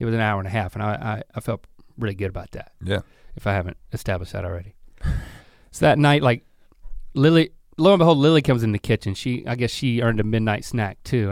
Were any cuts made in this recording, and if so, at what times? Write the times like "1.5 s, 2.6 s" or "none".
none